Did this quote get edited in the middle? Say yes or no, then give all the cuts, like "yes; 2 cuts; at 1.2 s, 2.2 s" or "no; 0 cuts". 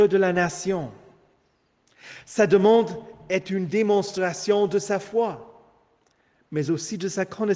no; 0 cuts